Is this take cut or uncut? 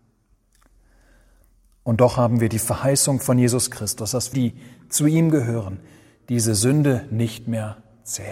cut